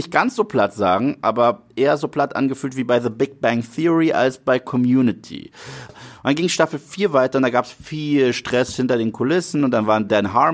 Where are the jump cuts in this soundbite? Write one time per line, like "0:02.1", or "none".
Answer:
0:05.9